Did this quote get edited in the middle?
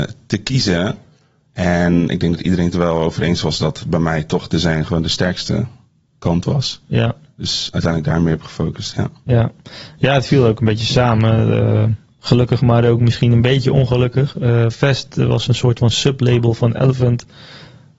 no; 0 cuts

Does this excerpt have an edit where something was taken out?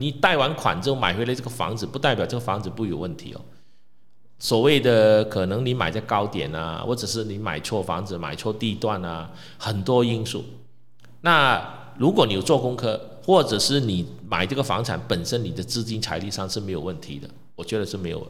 no; 0 cuts

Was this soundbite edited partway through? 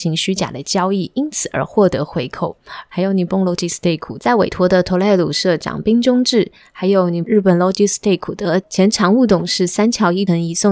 yes; 1 cut; at 2.9 s

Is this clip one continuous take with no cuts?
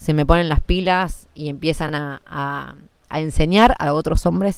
yes; 0 cuts

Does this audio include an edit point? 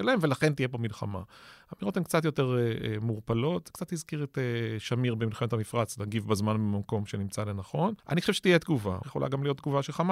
yes; 2 cuts; at 8.0 s, 9.0 s

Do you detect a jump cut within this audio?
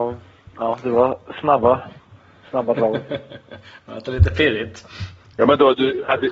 no; 0 cuts

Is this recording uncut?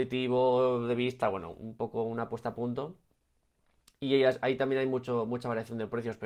yes; 0 cuts

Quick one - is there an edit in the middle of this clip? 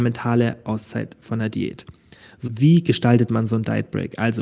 yes; 1 cut; at 2.4 s

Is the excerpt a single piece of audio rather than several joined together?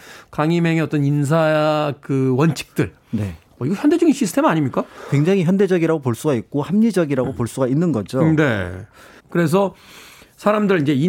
no; 1 cut; at 9.2 s

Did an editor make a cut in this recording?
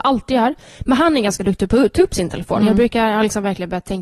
no; 0 cuts

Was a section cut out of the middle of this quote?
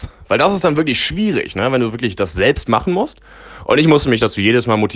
no; 0 cuts

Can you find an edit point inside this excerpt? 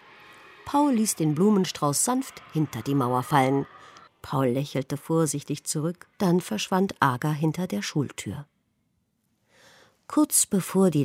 yes; 2 cuts; at 4.1 s, 6.1 s

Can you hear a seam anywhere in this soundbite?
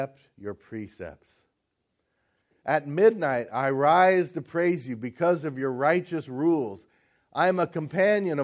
no; 0 cuts

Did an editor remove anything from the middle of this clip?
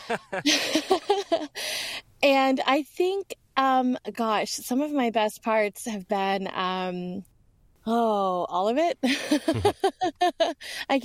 no; 0 cuts

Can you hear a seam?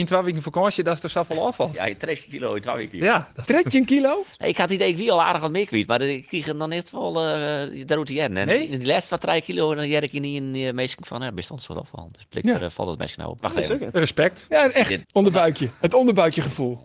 yes; 2 cuts; at 13.4 s, 15.0 s

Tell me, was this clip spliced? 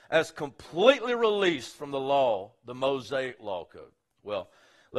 no; 0 cuts

